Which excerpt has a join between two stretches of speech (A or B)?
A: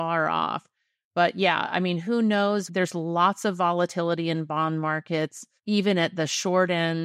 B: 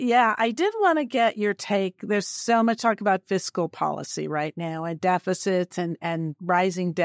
A